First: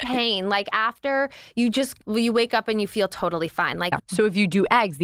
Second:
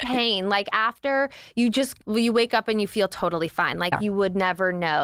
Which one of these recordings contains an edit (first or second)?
first